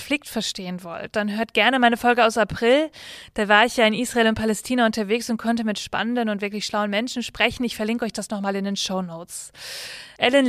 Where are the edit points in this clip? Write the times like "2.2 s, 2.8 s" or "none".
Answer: none

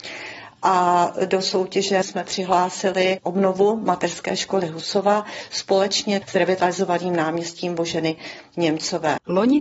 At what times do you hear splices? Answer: none

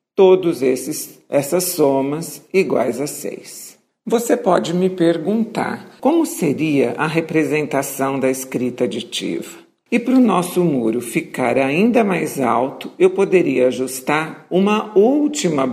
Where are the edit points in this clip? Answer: 6.0 s, 9.9 s

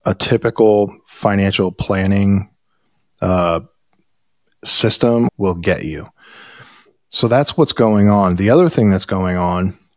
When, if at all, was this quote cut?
none

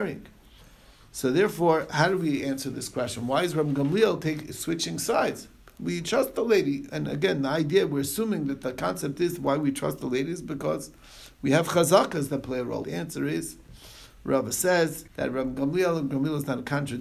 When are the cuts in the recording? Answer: 6.9 s, 12.8 s, 15.1 s

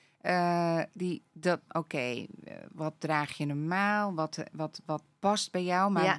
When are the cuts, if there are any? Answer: 1.7 s

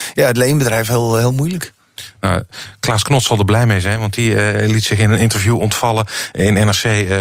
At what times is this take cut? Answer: none

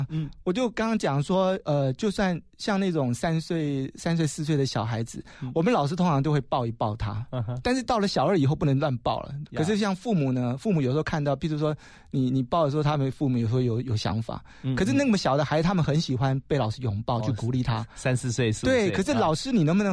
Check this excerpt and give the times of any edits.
9.5 s

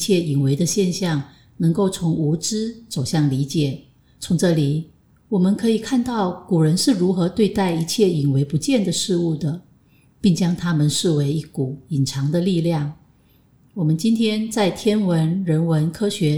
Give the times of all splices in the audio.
none

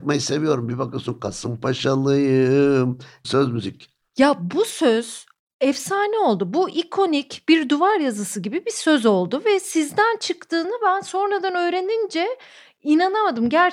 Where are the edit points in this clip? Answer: 3.2 s

